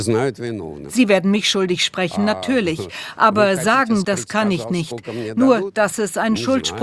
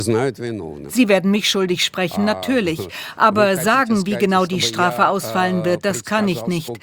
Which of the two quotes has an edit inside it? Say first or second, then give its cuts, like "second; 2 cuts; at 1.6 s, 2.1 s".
first; 1 cut; at 4.0 s